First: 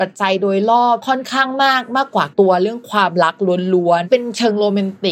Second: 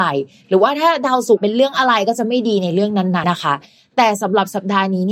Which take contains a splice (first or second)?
second